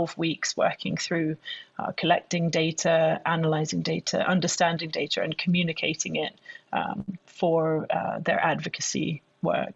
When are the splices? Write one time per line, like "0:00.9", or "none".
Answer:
none